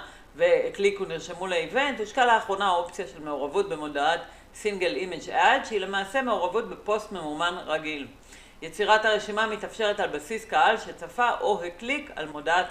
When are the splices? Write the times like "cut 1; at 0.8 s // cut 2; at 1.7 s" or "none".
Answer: none